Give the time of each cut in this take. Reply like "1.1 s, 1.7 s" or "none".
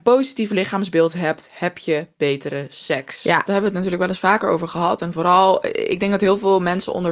3.5 s